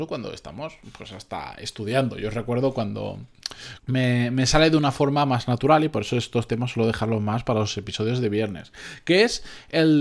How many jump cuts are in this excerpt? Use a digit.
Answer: 1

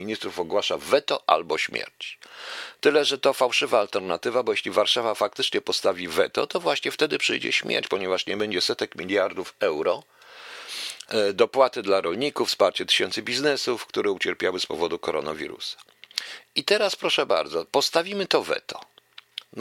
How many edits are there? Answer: 0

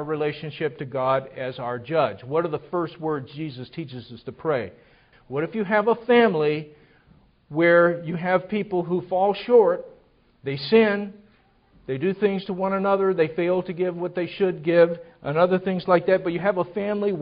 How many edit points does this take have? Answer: 1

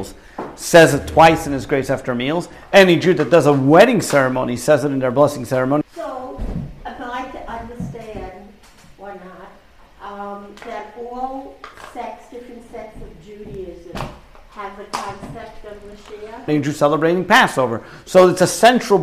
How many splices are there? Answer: 2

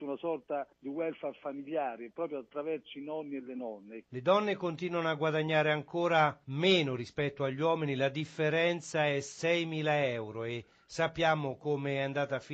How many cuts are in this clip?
0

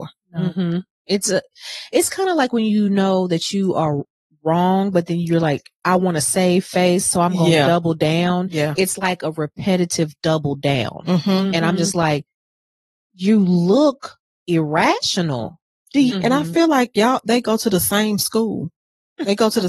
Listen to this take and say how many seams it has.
1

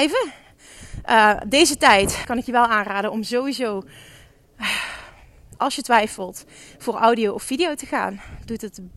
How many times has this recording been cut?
1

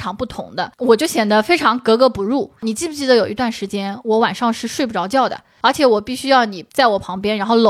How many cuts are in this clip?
1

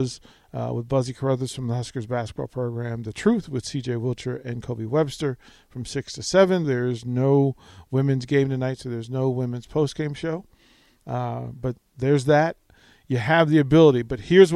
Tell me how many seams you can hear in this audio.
1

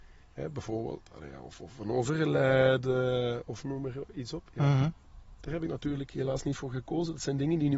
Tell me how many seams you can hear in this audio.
0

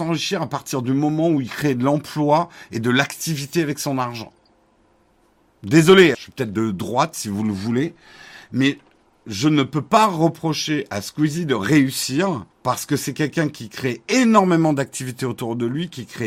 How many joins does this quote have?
2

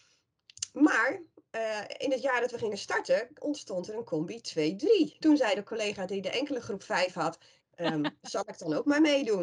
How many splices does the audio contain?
2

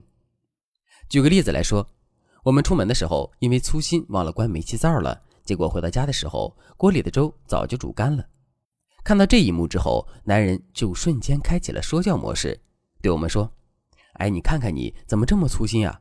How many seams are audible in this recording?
0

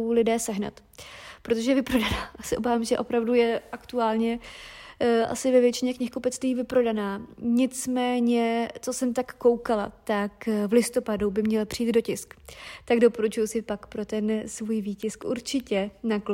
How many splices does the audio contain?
0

